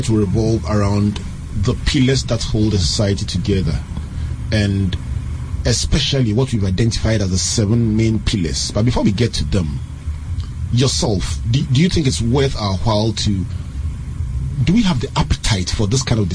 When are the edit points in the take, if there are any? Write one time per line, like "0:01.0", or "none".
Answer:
none